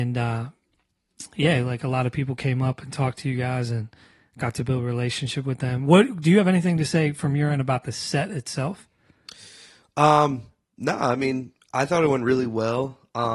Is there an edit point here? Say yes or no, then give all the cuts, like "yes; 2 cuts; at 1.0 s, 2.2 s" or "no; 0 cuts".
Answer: no; 0 cuts